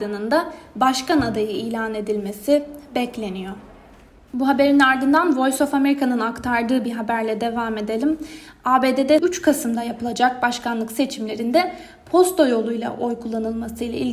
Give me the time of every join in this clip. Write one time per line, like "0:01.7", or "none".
none